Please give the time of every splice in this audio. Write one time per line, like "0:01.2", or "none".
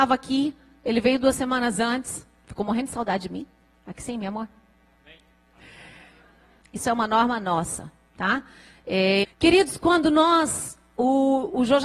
0:06.6
0:09.2